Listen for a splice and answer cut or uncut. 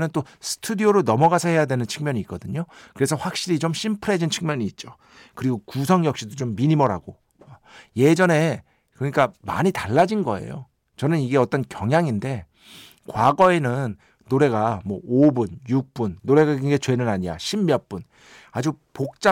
uncut